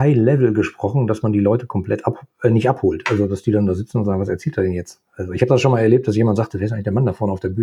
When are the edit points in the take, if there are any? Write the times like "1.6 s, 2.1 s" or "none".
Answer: none